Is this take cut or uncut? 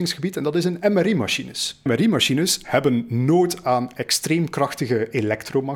cut